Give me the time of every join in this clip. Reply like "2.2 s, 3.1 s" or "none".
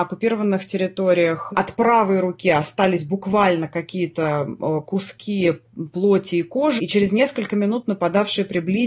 1.5 s, 6.8 s